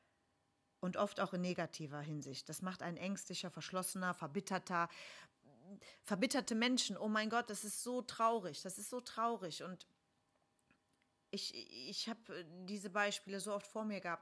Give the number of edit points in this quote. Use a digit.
0